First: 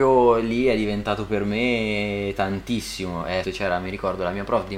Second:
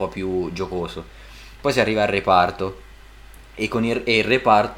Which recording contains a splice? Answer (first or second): first